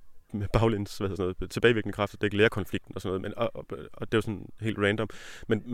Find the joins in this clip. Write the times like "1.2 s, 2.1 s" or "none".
4.1 s